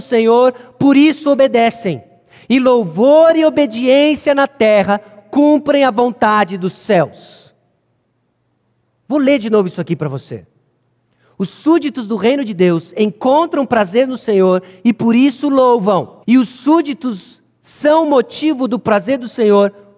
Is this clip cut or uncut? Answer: cut